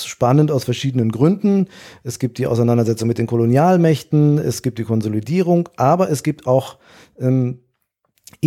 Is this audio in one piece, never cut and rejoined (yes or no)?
yes